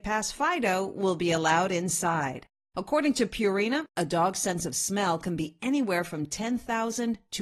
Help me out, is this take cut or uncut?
uncut